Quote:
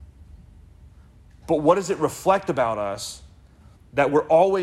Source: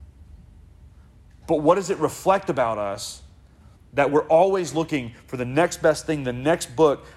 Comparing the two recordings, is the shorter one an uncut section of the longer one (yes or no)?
yes